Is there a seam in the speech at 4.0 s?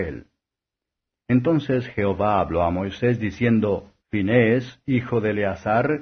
yes; 2 cuts; at 1.2 s, 4.0 s

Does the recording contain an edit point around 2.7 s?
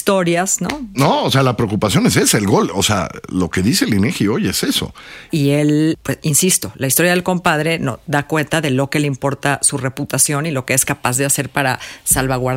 no; 2 cuts; at 0.9 s, 5.3 s

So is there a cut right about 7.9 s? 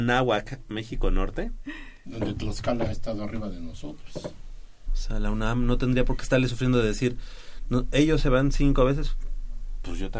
no; 2 cuts; at 2.0 s, 4.9 s

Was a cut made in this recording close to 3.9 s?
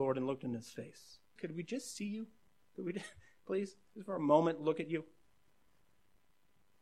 no; 1 cut; at 1.4 s

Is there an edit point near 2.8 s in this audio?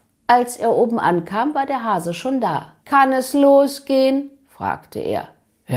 yes; 1 cut; at 2.8 s

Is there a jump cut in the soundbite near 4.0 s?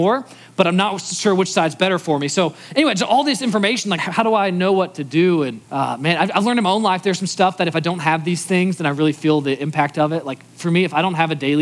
yes; 2 cuts; at 4.0 s, 5.6 s

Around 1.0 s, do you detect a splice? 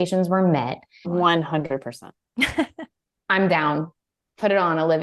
yes; 1 cut; at 1.0 s

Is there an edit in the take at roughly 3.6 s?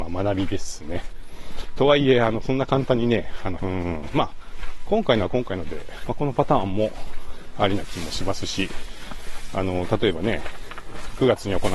yes; 3 cuts; at 1.8 s, 3.6 s, 6.1 s

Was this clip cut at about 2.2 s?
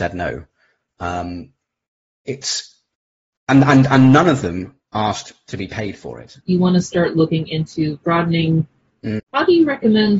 no; 2 cuts; at 6.4 s, 9.2 s

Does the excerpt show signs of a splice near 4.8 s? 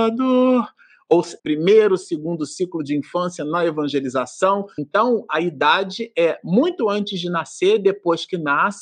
yes; 2 cuts; at 1.4 s, 4.8 s

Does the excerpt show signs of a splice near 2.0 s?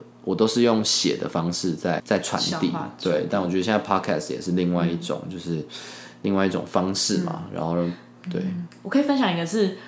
yes; 1 cut; at 2.0 s

